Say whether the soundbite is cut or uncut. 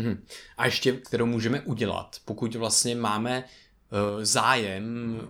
cut